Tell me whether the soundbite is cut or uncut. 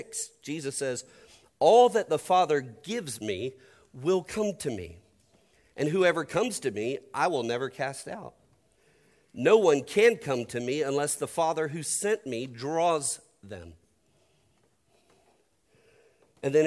uncut